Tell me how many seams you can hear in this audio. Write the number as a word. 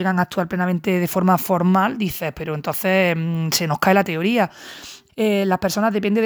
one